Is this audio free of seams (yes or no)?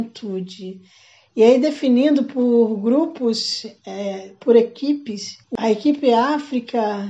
no